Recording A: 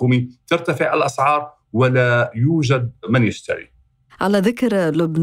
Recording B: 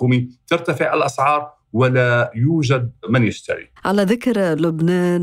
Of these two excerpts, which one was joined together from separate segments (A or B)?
B